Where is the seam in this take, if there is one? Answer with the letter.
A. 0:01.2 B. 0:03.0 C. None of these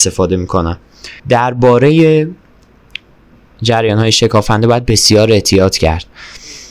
A